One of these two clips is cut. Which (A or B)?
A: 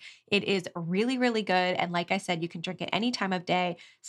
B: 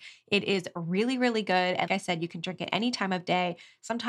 B